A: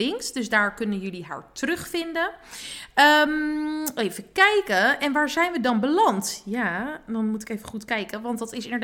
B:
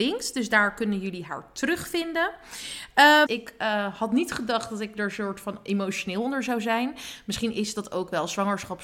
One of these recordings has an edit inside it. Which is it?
B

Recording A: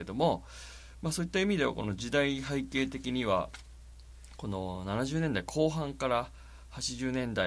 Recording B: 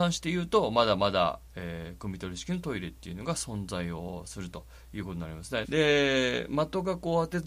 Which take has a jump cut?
B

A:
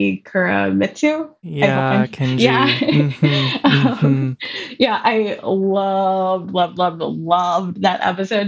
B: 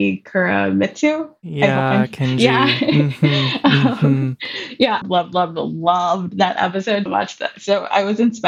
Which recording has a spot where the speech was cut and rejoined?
B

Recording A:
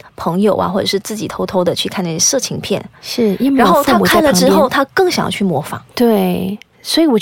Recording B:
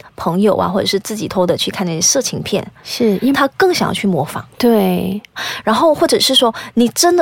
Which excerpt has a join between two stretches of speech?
B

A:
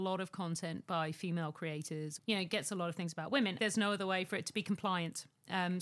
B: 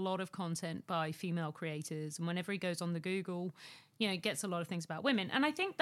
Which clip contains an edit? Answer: A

